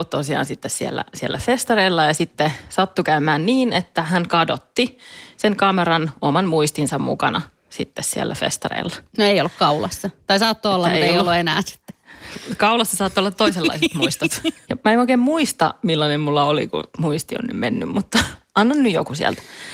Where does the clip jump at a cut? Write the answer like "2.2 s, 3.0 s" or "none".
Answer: 14.6 s